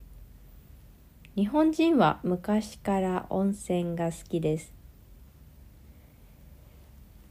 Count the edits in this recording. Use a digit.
0